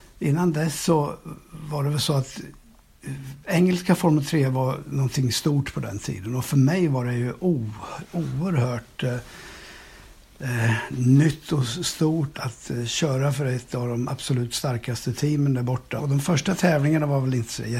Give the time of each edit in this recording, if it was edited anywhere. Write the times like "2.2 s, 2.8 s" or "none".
12.3 s, 16.0 s